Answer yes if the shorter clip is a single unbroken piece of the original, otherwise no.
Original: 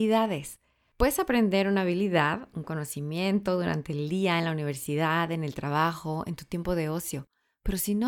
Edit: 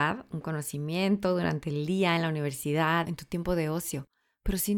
no